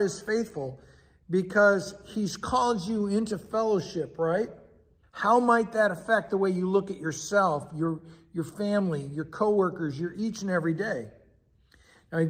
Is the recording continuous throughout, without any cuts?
no; 1 cut; at 5.0 s

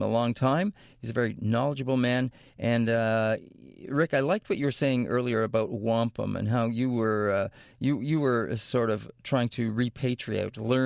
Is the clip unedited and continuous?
yes; 0 cuts

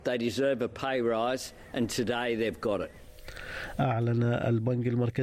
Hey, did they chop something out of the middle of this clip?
yes; 1 cut; at 3.8 s

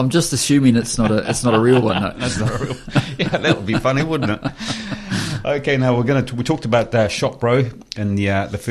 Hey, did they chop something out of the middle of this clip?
no; 0 cuts

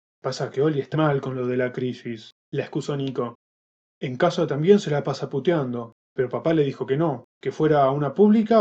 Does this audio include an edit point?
yes; 3 cuts; at 0.9 s, 6.0 s, 7.3 s

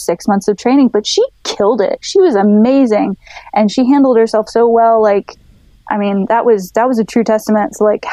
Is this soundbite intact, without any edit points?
no; 1 cut; at 2.0 s

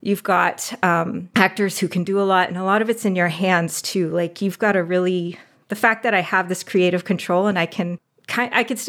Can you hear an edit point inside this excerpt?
no; 0 cuts

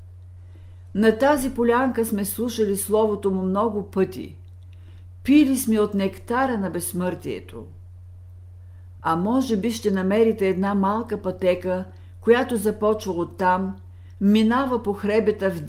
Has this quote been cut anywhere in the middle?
no; 0 cuts

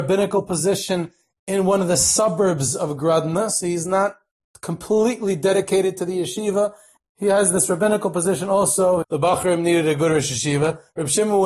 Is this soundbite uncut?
no; 2 cuts; at 7.0 s, 9.0 s

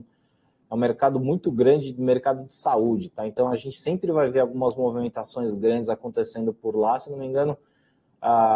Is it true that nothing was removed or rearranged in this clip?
yes; 0 cuts

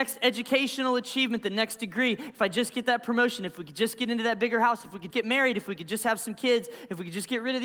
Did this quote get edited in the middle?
yes; 1 cut; at 5.1 s

